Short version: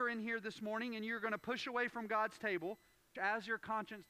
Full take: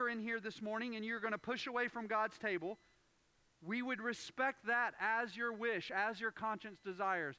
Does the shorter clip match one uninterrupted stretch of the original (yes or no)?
no